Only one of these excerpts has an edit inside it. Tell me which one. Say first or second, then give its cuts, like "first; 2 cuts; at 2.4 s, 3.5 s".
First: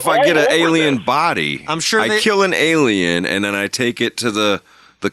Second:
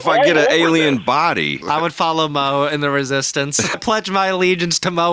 second; 2 cuts; at 1.6 s, 3.7 s